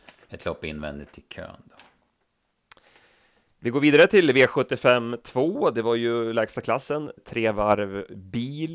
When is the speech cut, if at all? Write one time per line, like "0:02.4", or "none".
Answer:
0:07.2